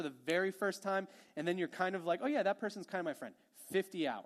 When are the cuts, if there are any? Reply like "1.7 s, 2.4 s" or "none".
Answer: none

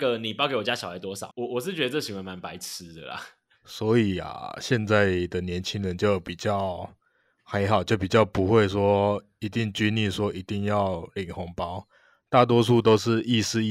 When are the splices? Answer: 1.3 s

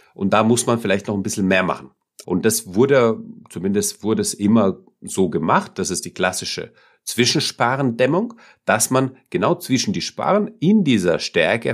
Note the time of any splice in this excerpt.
2.2 s

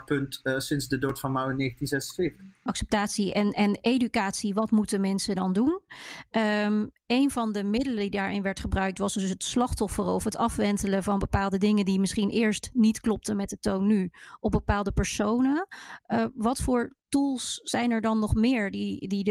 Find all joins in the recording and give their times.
2.7 s, 17.0 s

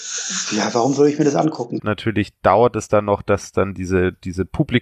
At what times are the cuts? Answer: 1.8 s

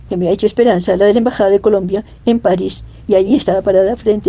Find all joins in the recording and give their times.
none

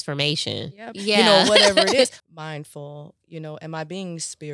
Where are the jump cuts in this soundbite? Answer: 0.9 s, 2.2 s

